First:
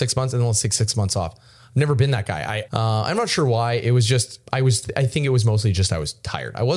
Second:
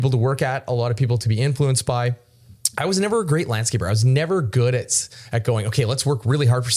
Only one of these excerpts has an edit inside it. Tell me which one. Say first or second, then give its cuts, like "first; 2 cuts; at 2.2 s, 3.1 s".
first; 1 cut; at 2.7 s